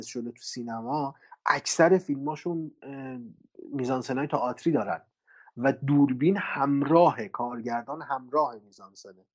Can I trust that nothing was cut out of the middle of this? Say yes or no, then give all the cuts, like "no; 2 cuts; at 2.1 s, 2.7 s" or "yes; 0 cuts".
yes; 0 cuts